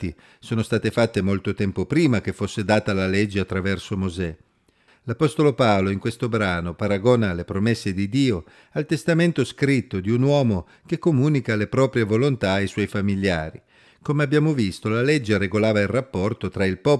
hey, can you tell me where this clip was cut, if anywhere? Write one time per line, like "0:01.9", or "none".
0:04.9
0:13.9